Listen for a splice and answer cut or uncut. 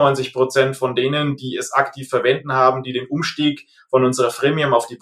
uncut